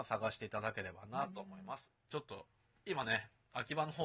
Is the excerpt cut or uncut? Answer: cut